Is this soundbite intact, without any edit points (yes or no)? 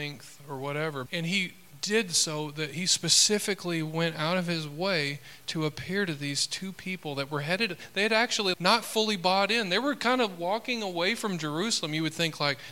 no